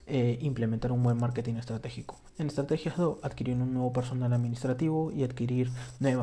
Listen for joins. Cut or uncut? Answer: uncut